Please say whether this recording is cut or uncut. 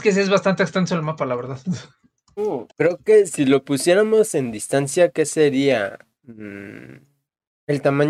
cut